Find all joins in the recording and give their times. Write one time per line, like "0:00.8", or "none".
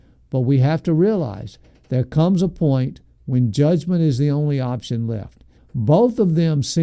0:05.6